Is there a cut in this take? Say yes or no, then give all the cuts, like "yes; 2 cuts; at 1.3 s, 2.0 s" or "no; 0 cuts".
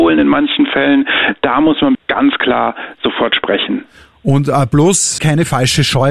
yes; 2 cuts; at 1.9 s, 5.2 s